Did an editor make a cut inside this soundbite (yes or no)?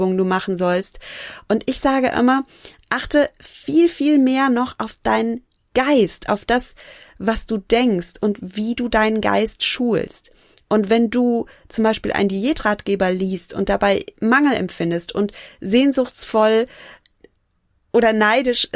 no